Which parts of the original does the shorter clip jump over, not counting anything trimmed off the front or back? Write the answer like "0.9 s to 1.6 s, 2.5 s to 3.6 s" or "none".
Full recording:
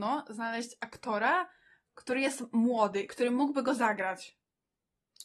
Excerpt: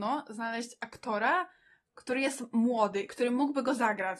none